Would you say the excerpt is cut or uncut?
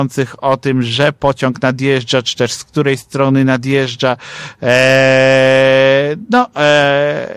uncut